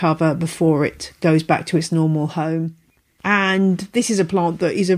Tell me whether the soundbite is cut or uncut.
cut